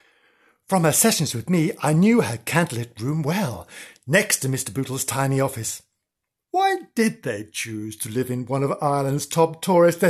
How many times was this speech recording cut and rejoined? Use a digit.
1